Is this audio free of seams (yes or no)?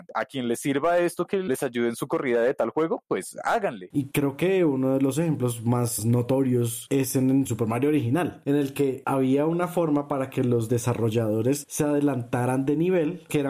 no